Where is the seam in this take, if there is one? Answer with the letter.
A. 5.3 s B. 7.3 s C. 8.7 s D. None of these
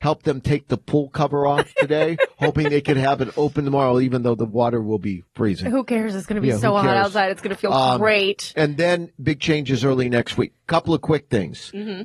A